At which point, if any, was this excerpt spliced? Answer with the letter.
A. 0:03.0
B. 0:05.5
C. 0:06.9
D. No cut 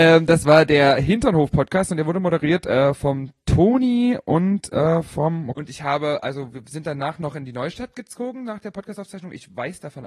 B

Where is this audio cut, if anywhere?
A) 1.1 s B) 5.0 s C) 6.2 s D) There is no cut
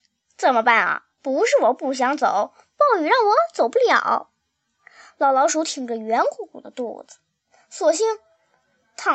D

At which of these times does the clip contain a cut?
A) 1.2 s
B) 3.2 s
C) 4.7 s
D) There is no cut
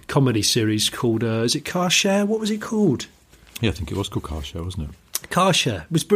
D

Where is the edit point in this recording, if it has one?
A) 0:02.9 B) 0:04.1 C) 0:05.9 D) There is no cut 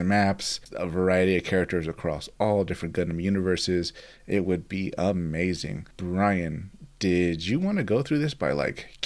C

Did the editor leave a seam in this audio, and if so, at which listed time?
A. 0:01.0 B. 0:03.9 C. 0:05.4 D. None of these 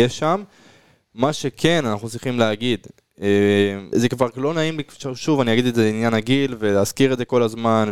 B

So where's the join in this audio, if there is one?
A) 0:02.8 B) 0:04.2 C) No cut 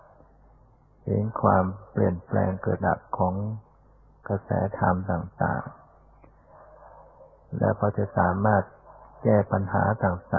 A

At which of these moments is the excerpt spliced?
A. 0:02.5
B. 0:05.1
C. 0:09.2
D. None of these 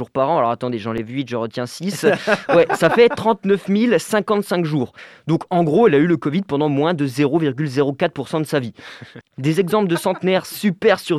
C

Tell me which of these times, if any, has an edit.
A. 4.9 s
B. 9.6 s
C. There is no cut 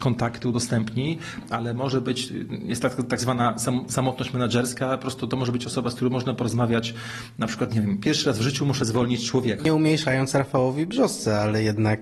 B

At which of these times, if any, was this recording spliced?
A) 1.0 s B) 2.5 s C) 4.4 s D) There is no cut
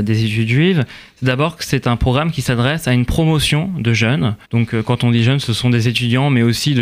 C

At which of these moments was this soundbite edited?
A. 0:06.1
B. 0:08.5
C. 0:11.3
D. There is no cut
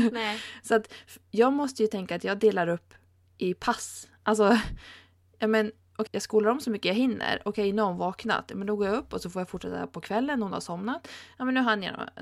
A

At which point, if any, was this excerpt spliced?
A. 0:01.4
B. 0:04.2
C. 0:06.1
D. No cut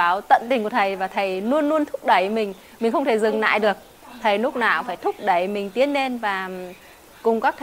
D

